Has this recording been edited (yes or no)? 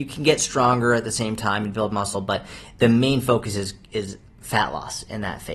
no